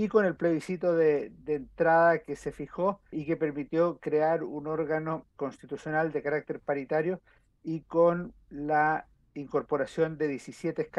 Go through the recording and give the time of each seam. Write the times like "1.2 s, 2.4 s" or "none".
3.1 s, 5.4 s